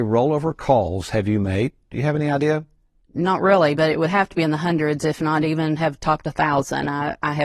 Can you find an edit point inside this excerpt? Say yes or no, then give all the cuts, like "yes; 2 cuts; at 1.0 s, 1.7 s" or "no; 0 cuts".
no; 0 cuts